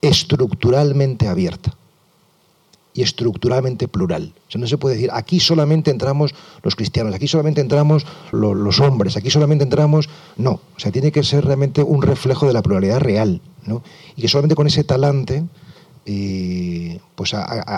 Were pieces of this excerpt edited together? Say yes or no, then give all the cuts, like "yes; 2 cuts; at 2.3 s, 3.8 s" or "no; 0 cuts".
yes; 2 cuts; at 4.4 s, 8.3 s